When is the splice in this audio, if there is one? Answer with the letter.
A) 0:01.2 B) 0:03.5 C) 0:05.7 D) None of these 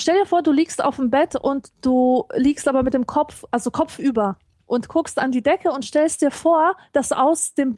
D